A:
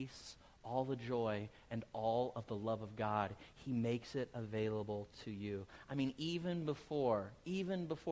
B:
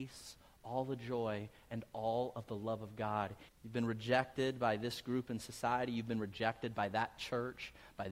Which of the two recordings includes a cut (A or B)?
B